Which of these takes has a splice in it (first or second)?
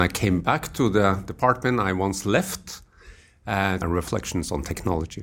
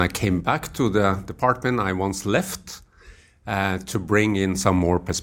first